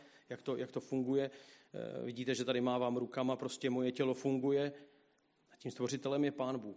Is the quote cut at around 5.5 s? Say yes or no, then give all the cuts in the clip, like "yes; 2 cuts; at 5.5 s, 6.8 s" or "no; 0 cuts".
yes; 1 cut; at 5.5 s